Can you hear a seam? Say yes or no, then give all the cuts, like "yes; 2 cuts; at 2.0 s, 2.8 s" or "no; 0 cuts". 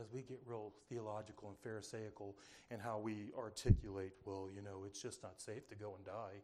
no; 0 cuts